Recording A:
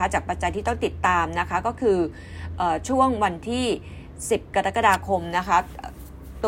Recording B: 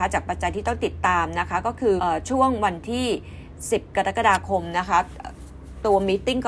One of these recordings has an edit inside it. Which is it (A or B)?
B